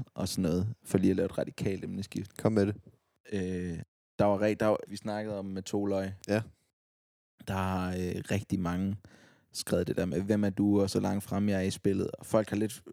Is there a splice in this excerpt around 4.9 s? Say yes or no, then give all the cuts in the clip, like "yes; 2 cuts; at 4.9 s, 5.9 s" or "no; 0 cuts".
yes; 1 cut; at 4.9 s